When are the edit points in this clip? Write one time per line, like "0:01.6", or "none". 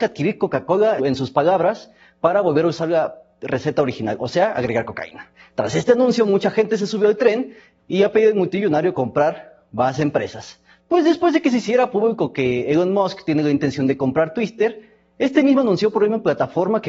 0:01.0
0:10.8